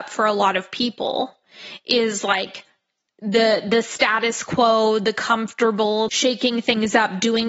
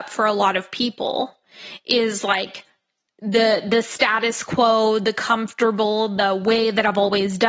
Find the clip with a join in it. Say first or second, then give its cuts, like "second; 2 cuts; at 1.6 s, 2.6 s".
first; 1 cut; at 6.1 s